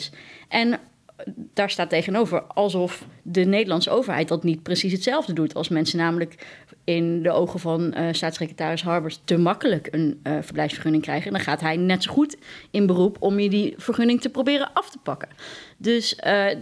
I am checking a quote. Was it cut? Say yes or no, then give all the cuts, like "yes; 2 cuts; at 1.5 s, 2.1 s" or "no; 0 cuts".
no; 0 cuts